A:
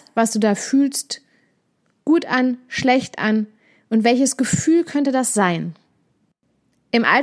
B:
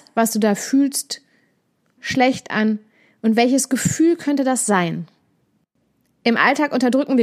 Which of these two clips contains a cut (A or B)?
B